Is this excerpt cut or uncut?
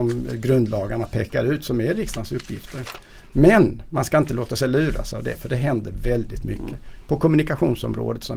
uncut